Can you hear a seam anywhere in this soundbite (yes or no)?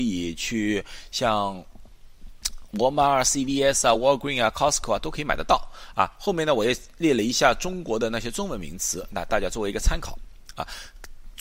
no